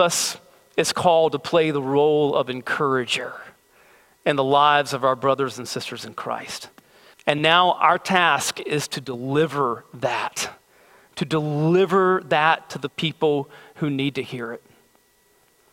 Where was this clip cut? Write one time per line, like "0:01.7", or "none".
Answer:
0:07.1